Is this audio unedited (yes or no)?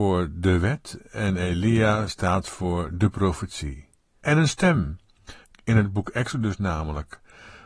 no